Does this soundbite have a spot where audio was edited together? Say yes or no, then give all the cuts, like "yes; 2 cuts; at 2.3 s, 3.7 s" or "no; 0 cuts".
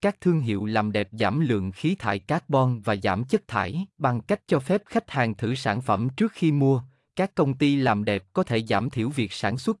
yes; 1 cut; at 3.9 s